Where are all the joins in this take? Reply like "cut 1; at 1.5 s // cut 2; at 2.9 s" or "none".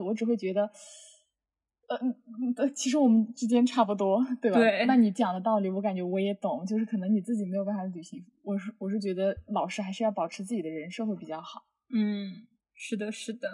none

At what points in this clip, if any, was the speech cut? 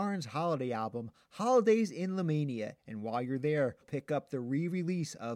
cut 1; at 3.8 s

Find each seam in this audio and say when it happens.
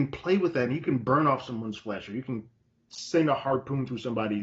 none

